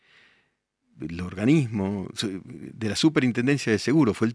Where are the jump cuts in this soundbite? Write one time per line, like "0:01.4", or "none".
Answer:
none